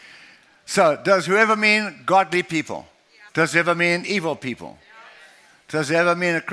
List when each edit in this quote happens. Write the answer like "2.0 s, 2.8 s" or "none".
3.3 s

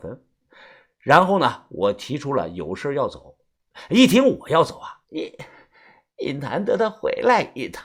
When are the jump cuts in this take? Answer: 5.0 s

